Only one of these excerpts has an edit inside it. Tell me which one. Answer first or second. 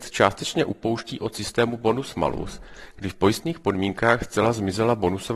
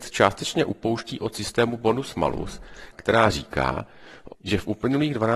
second